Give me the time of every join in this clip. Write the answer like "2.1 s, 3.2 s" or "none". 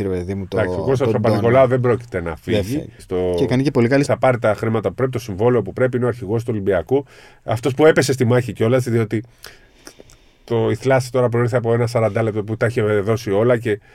3.0 s, 4.0 s